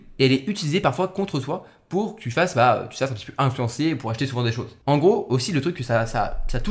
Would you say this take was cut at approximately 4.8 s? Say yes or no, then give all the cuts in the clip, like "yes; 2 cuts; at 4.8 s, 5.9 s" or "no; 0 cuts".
yes; 1 cut; at 4.8 s